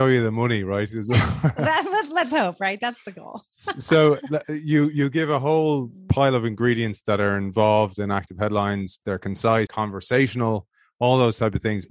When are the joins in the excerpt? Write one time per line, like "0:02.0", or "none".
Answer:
0:09.7